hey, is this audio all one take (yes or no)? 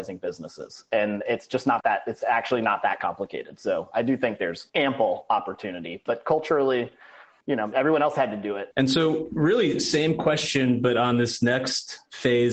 no